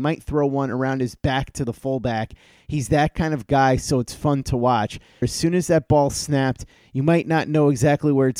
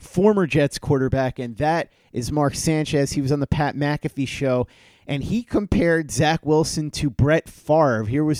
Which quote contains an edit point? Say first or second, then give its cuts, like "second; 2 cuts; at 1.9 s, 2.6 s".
first; 1 cut; at 5.2 s